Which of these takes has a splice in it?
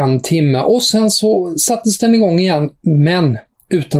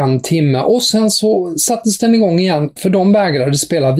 second; 1 cut; at 2.8 s

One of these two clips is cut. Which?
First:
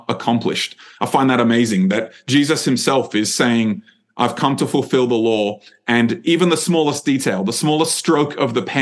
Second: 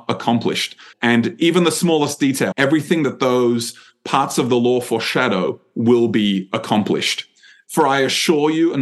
second; 3 cuts; at 0.9 s, 2.5 s, 7.7 s

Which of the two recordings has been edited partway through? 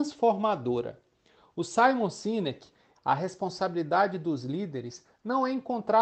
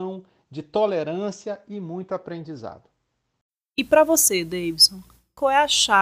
first; 1 cut; at 3.0 s

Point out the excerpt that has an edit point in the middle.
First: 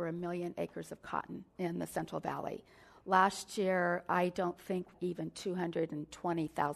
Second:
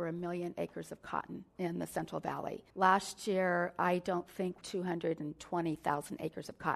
second; 2 cuts; at 2.7 s, 4.6 s

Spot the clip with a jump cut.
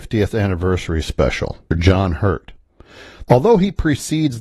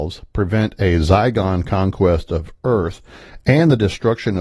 first; 2 cuts; at 1.7 s, 3.3 s

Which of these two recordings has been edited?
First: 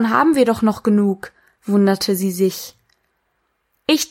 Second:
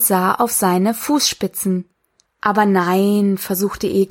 second; 1 cut; at 2.3 s

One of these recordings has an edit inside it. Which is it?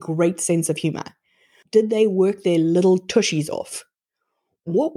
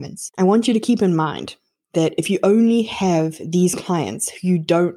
first; 1 cut; at 1.6 s

